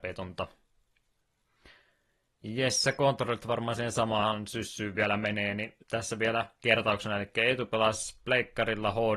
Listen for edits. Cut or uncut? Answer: cut